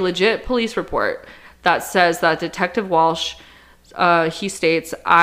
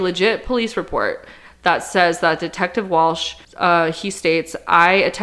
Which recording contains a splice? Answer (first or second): second